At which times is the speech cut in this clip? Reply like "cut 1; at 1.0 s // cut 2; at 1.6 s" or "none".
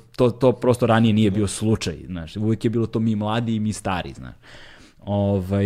none